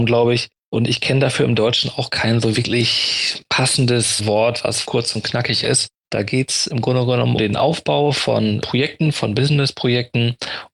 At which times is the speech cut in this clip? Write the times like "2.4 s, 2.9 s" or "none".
6.0 s, 7.4 s